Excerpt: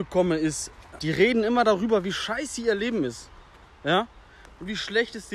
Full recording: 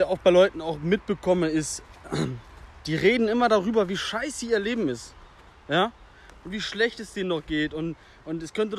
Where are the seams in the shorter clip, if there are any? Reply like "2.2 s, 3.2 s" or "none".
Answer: 1.0 s